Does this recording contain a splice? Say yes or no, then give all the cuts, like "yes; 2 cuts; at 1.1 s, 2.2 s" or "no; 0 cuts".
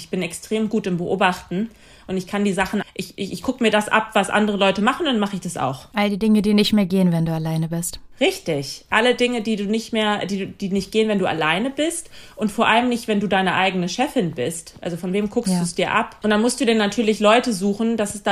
yes; 1 cut; at 2.8 s